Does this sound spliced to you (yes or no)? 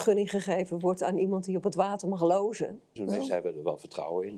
yes